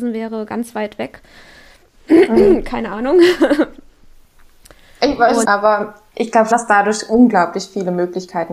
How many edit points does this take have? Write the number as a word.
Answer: three